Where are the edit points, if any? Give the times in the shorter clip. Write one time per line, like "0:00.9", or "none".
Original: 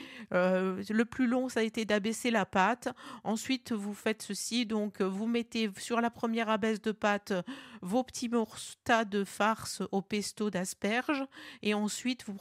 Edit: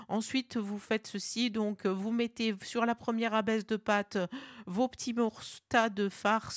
none